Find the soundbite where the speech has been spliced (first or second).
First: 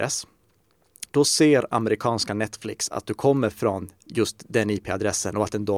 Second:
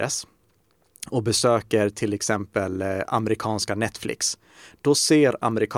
first